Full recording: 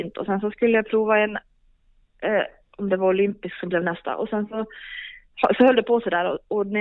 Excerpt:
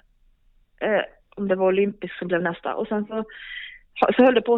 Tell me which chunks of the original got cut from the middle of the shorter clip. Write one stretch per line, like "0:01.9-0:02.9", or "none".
none